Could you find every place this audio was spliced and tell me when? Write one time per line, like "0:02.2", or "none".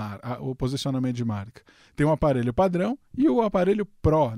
none